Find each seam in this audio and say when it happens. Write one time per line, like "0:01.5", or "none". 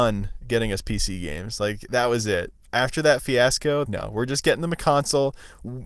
0:03.8

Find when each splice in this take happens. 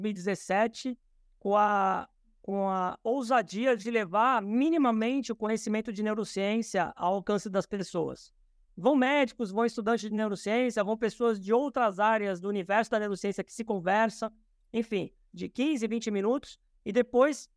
0:08.7
0:15.3

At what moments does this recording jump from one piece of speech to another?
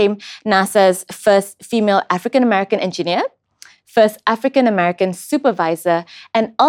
none

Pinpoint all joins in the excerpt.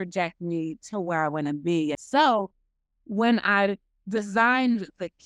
0:01.9

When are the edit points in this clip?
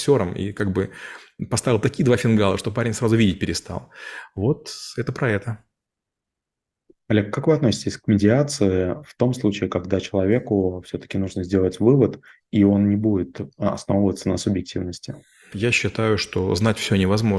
0:15.5

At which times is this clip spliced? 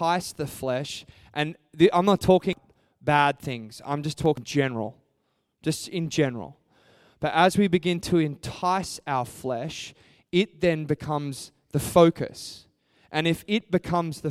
none

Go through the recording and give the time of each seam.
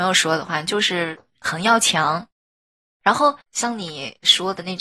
0:03.5

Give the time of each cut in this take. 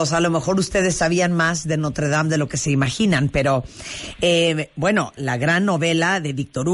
0:05.2

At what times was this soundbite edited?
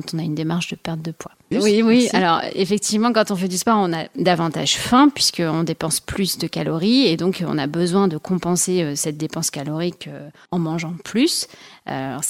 0:01.5

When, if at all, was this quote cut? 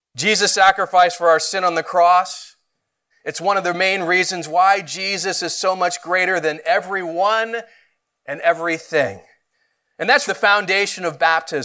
0:03.1
0:10.3

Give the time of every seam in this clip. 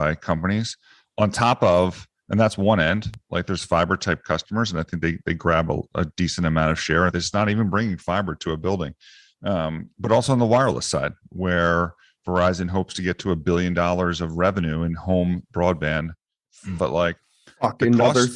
0:07.1
0:16.8

